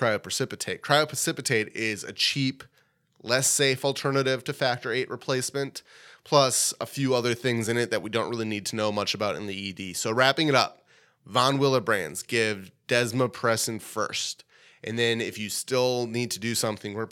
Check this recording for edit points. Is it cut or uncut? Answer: uncut